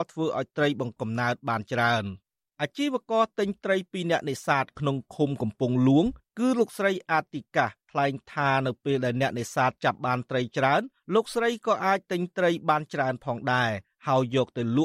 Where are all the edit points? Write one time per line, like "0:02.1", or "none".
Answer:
0:01.0